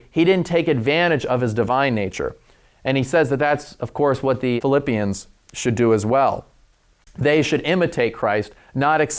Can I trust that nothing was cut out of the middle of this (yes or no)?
yes